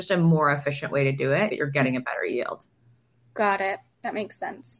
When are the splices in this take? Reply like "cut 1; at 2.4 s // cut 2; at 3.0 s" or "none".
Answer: cut 1; at 1.5 s